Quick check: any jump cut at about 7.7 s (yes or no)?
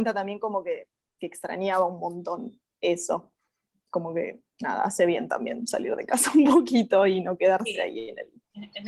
no